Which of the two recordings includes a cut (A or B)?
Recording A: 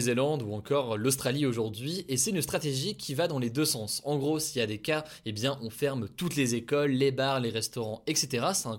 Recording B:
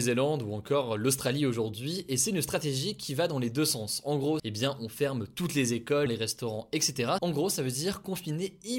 B